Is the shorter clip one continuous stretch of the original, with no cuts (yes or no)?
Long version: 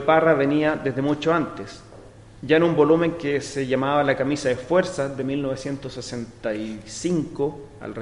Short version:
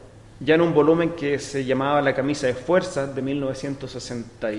yes